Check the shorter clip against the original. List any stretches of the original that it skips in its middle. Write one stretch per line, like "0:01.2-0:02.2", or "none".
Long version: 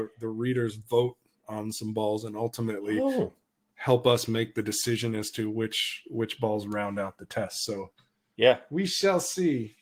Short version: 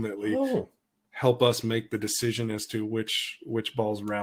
none